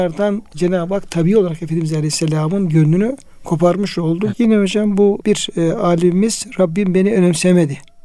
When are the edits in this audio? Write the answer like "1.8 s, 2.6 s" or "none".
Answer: 4.3 s